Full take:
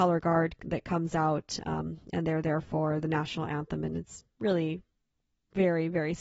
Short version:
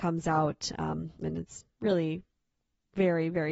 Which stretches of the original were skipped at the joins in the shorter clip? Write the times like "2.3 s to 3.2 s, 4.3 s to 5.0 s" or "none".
2.1 s to 3.8 s